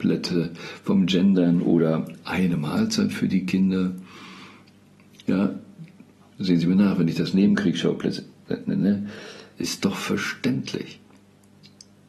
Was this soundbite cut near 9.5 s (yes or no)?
yes